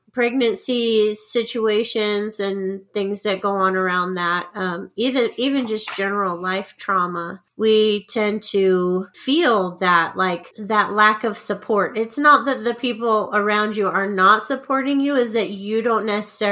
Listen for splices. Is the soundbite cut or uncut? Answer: uncut